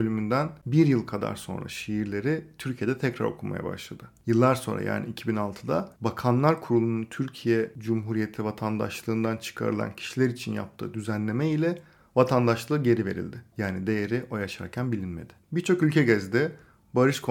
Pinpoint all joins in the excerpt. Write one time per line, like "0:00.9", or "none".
0:15.4